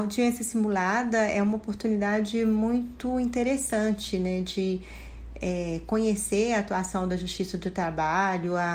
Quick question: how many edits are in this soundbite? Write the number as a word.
zero